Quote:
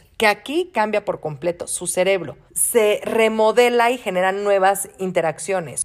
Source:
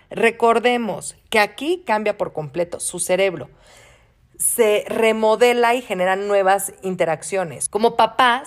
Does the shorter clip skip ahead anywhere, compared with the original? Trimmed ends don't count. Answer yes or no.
yes